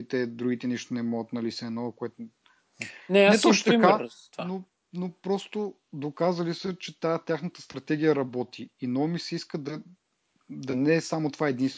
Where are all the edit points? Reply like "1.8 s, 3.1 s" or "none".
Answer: none